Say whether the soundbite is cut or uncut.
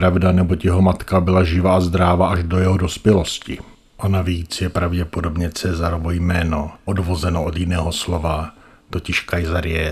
uncut